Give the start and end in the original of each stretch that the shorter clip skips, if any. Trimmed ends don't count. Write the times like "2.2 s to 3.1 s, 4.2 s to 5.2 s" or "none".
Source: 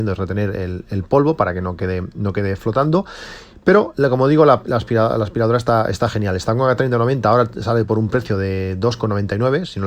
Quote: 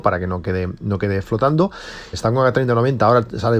3.5 s to 6.4 s